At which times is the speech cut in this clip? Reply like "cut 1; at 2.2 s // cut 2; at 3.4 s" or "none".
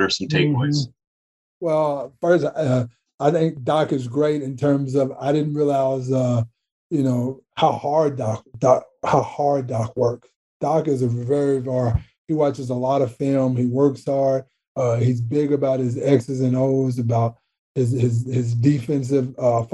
none